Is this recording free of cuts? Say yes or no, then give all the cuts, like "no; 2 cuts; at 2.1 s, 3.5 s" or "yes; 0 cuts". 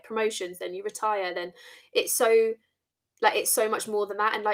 yes; 0 cuts